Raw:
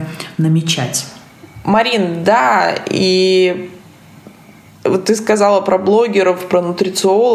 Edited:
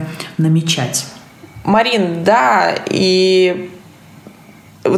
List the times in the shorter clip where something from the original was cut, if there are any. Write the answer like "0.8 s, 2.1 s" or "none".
none